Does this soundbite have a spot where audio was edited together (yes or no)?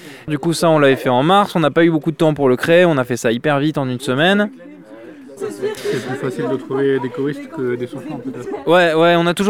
yes